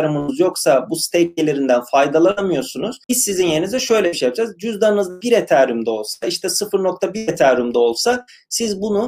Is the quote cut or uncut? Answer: cut